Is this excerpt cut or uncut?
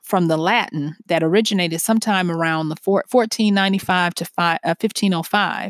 uncut